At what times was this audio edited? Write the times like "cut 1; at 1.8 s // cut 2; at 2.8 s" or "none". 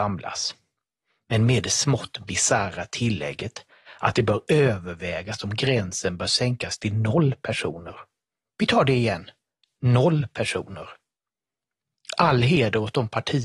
none